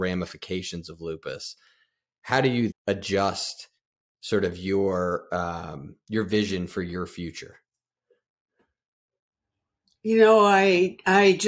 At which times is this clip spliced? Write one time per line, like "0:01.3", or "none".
0:02.7

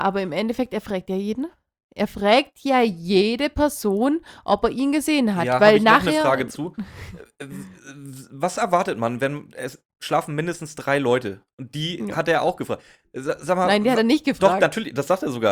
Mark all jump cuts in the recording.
none

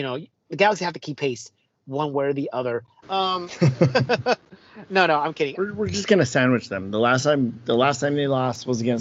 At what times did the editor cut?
0:03.0
0:05.6

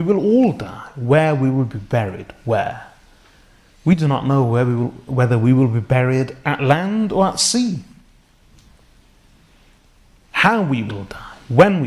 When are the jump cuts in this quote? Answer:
none

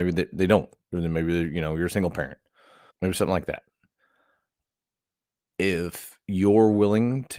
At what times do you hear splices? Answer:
0:02.9

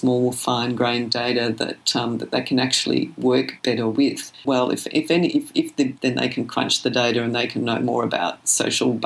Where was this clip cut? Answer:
0:04.4
0:06.0

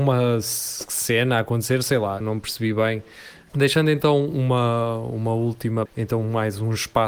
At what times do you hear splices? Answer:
0:02.2
0:03.5
0:05.9

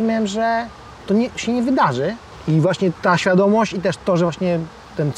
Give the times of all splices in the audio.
none

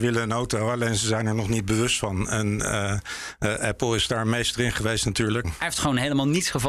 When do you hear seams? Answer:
0:05.4

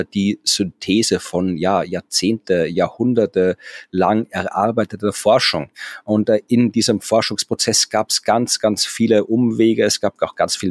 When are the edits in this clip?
none

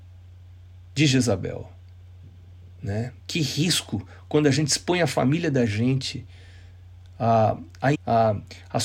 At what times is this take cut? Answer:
0:03.2
0:07.9

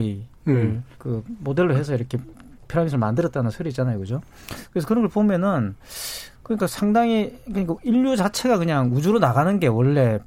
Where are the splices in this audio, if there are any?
0:00.9

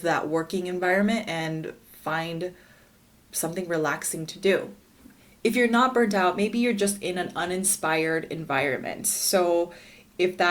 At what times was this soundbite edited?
none

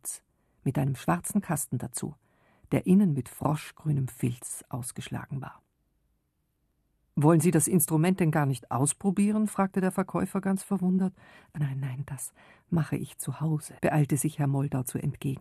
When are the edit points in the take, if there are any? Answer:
0:11.6
0:13.8

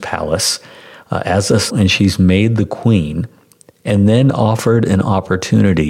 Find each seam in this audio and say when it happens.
0:01.7

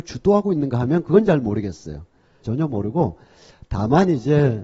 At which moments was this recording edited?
0:02.4

